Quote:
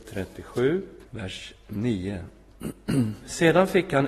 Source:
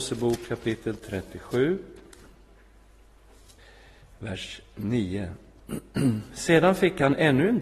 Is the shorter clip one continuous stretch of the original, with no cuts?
no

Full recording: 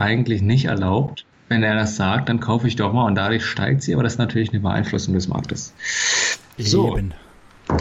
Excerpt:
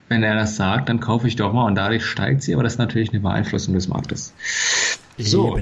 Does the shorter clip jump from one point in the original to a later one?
no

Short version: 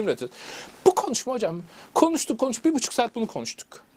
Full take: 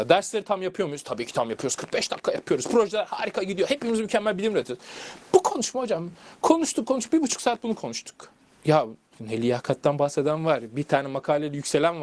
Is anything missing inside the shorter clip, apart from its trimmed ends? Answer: no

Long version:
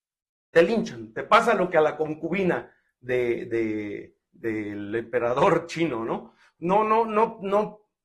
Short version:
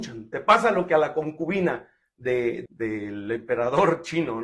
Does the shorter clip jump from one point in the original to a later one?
yes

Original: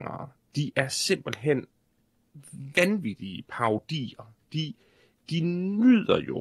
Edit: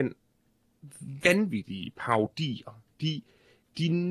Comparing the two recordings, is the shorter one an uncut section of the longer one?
yes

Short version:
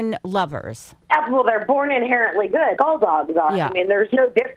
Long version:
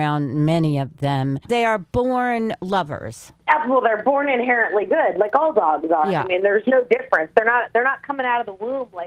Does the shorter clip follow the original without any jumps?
no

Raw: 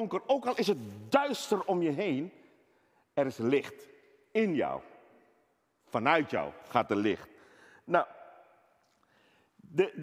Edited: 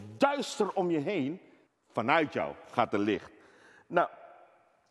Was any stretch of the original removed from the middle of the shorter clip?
yes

